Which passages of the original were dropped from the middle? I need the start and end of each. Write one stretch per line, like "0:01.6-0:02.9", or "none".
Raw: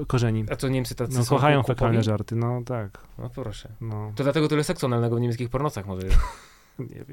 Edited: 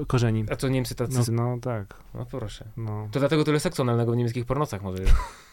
0:01.2-0:02.3

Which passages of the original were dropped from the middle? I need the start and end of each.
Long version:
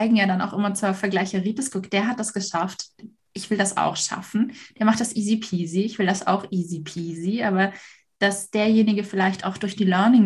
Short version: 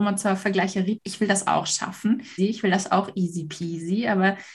0:01.5-0:03.3
0:04.7-0:05.7

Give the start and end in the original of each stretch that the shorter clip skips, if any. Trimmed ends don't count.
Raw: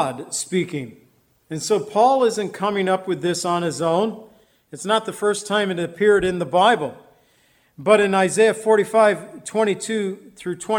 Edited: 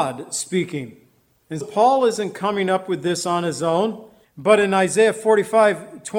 0:01.6-0:01.8
0:04.4-0:07.6

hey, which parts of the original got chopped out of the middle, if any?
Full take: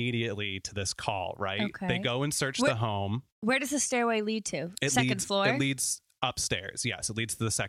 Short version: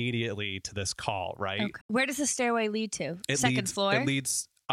0:01.8-0:03.3

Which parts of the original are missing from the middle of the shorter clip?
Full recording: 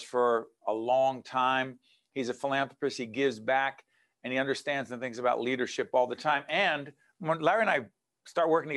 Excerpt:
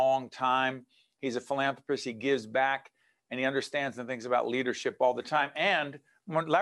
none

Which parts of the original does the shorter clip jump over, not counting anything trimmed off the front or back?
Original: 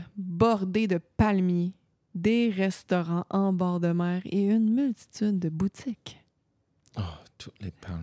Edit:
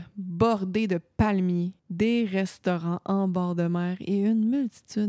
0:01.8-0:02.0

